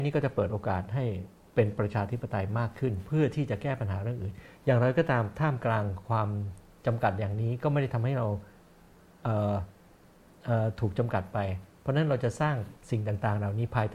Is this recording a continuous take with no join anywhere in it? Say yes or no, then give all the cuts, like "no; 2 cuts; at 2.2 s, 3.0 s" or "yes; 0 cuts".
yes; 0 cuts